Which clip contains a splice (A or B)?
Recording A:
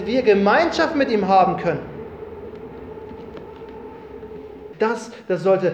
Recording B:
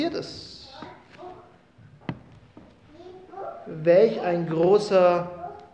A